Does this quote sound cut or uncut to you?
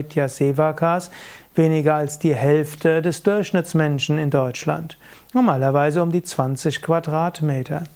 uncut